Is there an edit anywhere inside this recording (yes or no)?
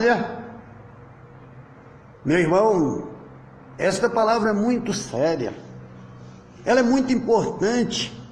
no